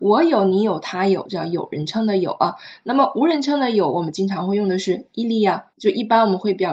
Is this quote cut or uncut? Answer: cut